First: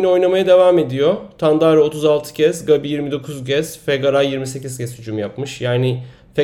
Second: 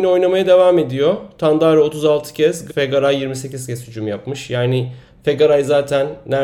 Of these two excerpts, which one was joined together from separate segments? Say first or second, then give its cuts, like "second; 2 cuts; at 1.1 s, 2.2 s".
second; 1 cut; at 2.7 s